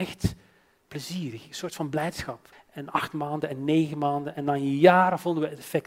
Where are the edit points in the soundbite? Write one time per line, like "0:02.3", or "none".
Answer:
0:02.5

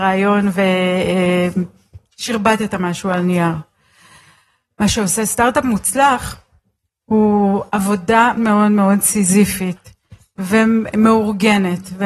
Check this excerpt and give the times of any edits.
0:08.4

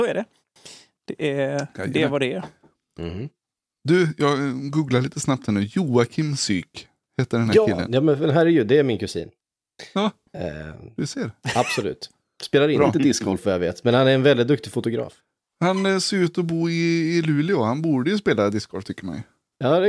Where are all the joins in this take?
none

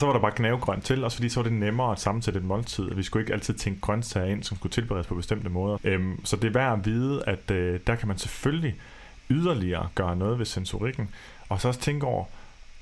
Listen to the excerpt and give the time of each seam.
0:05.8

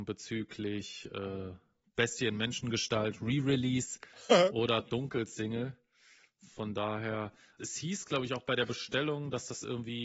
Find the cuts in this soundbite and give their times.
0:07.6

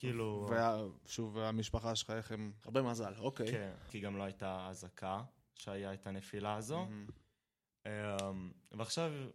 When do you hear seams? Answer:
0:02.6
0:03.9

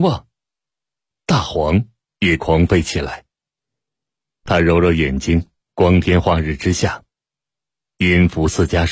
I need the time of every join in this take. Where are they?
0:04.4
0:05.6

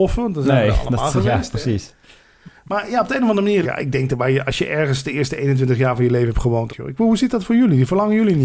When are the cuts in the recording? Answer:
0:03.6
0:06.7

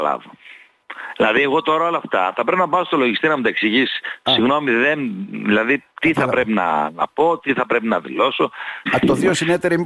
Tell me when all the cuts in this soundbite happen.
0:08.9

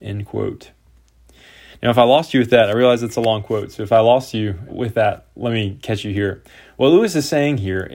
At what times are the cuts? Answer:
0:04.7

